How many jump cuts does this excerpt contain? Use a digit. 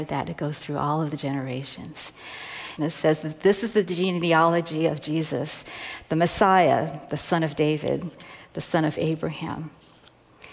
1